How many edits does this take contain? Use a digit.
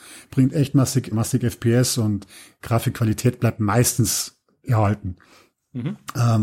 1